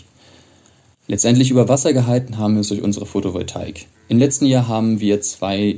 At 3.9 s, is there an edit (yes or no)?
yes